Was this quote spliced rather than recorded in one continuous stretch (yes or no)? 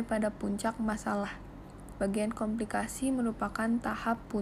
yes